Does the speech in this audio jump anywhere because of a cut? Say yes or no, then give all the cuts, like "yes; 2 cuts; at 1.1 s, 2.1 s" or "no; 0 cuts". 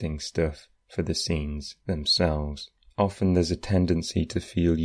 yes; 1 cut; at 2.9 s